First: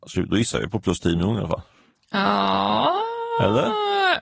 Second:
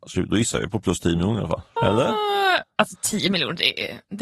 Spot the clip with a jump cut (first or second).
second